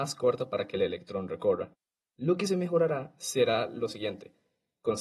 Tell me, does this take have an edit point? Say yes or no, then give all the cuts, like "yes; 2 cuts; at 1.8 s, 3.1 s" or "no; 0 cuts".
yes; 1 cut; at 2.0 s